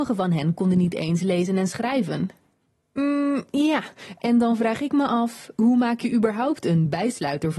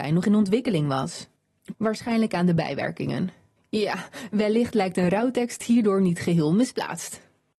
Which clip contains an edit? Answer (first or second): second